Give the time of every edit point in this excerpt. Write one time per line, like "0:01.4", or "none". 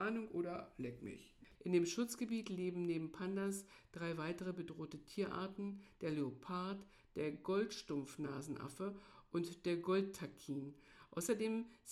0:01.5